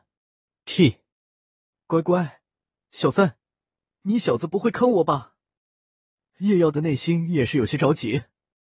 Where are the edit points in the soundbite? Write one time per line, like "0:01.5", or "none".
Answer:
none

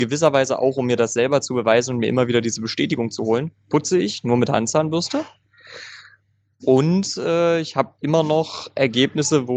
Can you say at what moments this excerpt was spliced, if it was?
none

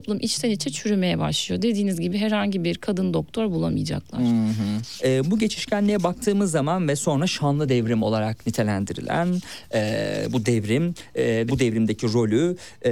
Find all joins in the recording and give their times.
0:05.0
0:11.5

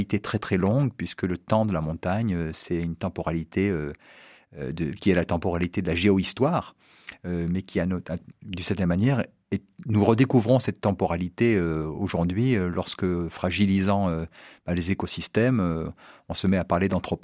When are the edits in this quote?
none

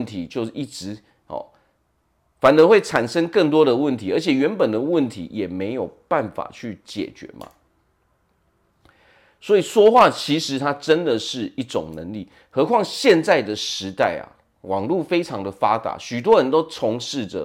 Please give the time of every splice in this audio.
none

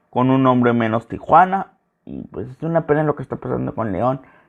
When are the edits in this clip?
none

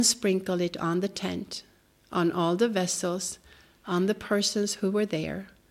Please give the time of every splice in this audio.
none

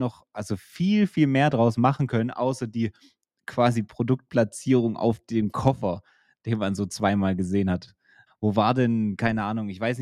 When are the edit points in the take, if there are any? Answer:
0:08.3

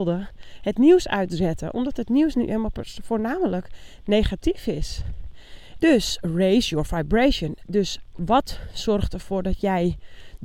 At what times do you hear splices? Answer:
0:05.8

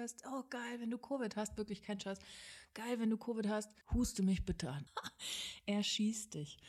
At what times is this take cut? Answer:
0:03.8
0:04.9

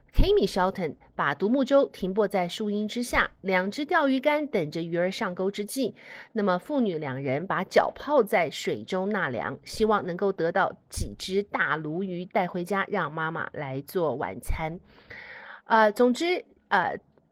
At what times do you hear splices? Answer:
none

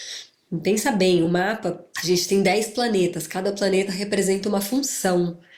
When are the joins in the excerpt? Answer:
none

